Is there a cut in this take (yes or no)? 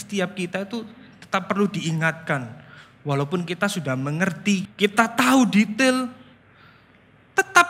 yes